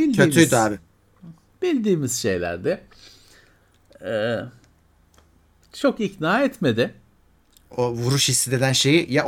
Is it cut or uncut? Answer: uncut